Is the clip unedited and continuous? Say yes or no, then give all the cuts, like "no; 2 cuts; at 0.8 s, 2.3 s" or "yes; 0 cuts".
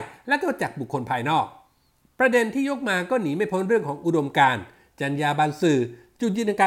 yes; 0 cuts